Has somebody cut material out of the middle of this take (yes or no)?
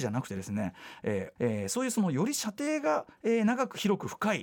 yes